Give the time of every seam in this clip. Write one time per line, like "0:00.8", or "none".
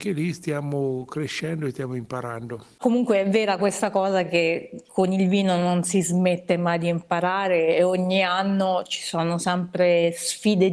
none